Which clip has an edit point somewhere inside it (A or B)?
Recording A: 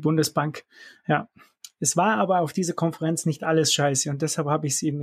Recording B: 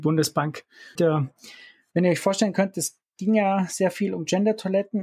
B